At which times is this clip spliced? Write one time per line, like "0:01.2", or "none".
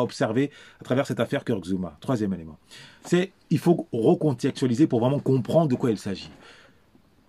none